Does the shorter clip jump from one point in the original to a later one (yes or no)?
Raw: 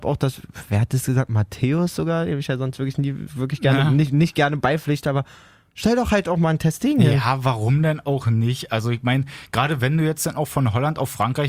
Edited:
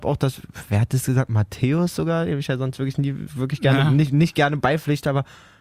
no